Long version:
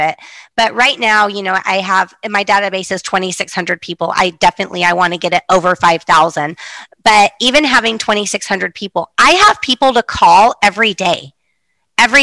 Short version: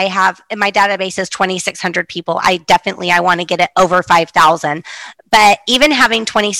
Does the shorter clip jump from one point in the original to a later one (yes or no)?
no